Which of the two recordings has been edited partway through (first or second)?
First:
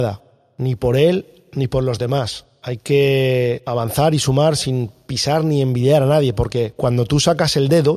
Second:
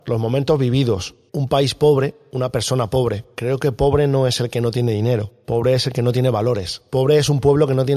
second